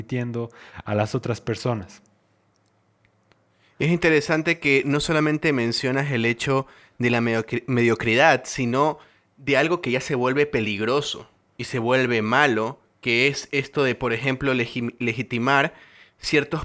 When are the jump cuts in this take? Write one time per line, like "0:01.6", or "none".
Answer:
none